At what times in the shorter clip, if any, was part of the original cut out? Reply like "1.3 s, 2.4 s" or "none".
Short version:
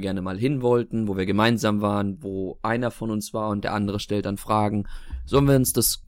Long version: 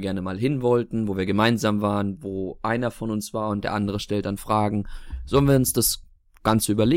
none